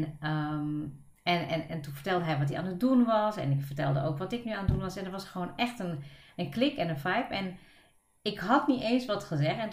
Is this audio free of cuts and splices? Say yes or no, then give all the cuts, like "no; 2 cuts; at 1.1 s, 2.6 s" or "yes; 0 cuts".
yes; 0 cuts